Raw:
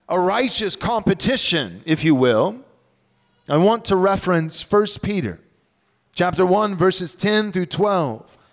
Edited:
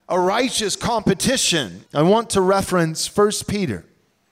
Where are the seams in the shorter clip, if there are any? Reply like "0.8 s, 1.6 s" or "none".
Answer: 1.8 s